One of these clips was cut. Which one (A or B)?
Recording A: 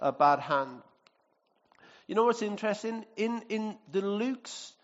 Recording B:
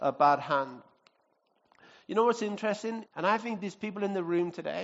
B